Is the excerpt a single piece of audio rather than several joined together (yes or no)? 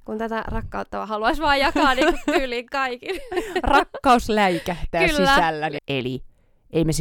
no